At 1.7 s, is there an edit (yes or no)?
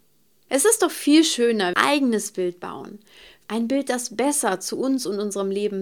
yes